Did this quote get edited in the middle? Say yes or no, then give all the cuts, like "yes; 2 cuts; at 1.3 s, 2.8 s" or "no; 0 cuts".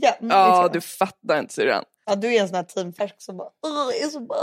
yes; 1 cut; at 2.0 s